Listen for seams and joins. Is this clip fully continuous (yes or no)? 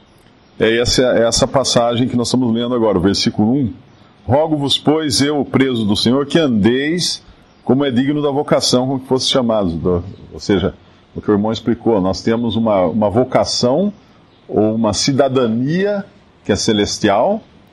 yes